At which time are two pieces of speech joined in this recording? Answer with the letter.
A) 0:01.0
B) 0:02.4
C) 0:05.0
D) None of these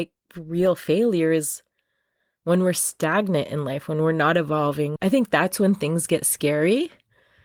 C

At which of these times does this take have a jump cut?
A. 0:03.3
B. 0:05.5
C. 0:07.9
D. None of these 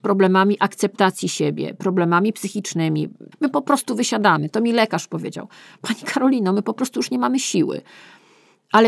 A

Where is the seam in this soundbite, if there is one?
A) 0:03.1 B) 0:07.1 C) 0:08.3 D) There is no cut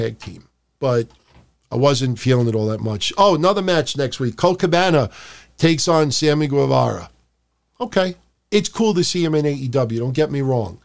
C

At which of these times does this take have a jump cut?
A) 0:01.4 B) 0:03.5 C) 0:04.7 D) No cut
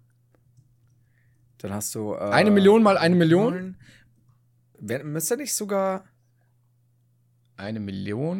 C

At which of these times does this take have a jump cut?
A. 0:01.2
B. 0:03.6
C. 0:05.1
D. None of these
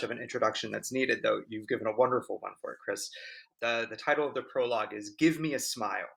B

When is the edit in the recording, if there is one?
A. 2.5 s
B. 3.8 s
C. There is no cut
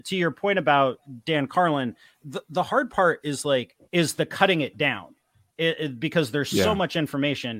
B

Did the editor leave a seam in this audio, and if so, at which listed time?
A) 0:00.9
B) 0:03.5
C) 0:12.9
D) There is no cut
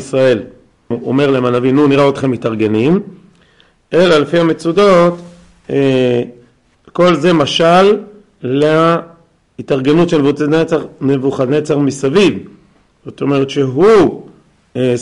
A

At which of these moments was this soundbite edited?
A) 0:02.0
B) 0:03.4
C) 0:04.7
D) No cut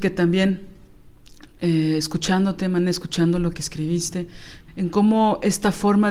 C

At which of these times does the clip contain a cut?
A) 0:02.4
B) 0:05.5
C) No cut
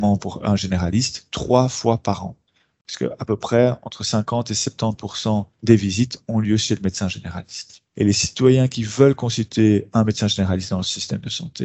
B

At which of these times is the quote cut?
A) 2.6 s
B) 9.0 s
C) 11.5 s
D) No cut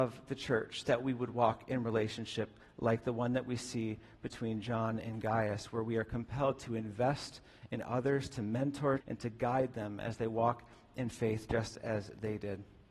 B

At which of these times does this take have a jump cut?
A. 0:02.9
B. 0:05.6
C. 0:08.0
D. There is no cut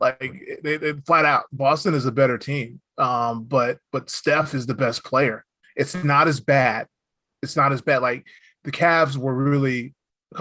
B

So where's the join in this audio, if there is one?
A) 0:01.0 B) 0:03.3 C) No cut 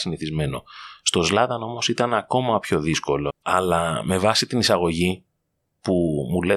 B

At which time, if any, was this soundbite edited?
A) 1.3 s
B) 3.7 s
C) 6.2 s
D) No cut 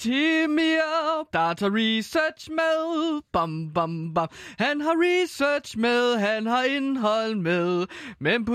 A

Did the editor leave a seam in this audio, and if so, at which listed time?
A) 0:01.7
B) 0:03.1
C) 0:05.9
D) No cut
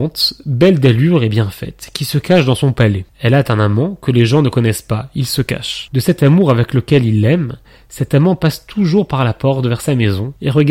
D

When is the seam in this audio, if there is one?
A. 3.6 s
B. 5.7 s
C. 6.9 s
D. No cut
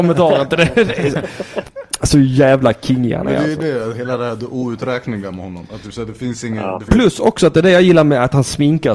C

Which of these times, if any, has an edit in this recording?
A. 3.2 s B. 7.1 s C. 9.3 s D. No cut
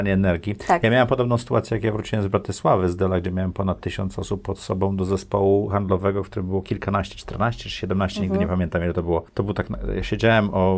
D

